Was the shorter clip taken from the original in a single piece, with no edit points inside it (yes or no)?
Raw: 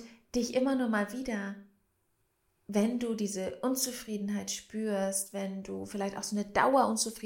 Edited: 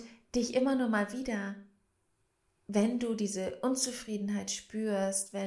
yes